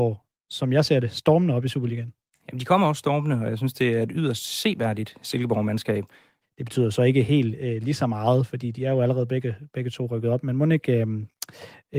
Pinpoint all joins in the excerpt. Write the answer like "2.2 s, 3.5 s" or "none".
6.4 s